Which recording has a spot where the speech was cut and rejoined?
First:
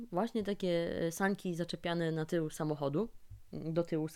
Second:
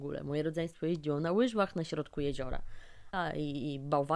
second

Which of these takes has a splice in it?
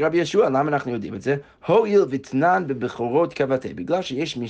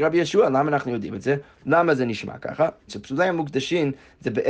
second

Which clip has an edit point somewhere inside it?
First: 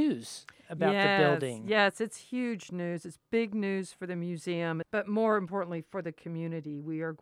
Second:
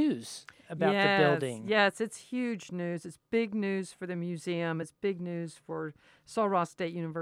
first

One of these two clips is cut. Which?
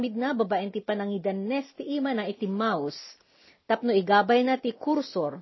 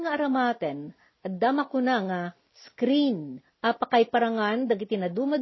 second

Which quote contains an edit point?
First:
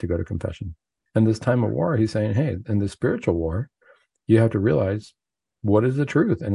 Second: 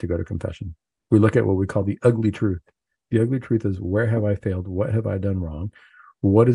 first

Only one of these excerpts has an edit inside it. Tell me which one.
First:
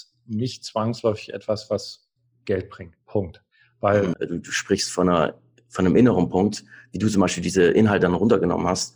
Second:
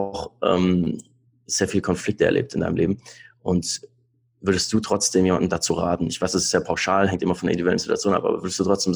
first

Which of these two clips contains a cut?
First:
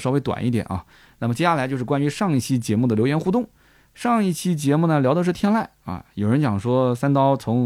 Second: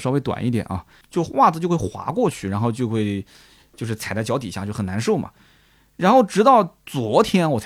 second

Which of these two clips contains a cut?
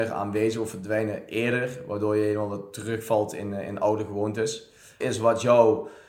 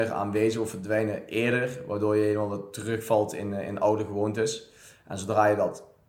first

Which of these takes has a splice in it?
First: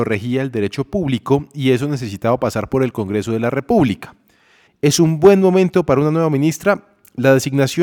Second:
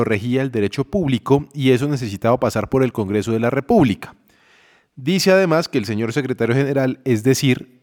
first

